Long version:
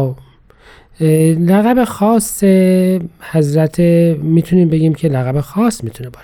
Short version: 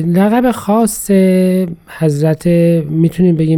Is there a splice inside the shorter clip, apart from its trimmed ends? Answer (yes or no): no